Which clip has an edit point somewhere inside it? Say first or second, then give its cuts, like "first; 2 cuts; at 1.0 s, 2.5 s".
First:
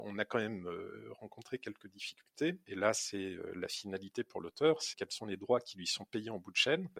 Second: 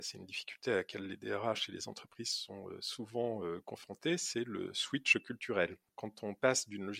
first; 2 cuts; at 2.7 s, 4.9 s